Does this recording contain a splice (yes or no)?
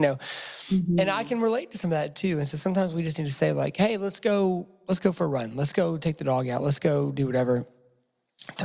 no